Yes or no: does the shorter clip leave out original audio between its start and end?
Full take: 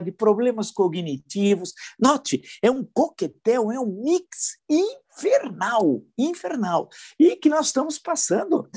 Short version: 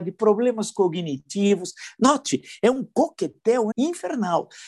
yes